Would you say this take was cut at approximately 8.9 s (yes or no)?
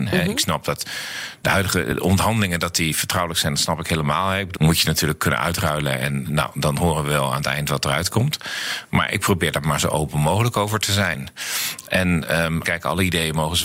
no